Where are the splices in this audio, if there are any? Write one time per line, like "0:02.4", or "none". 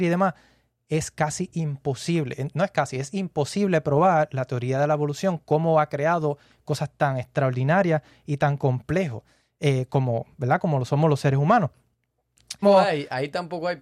0:12.6